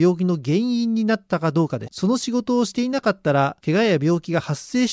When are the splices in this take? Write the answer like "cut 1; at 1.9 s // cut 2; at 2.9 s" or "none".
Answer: cut 1; at 1.9 s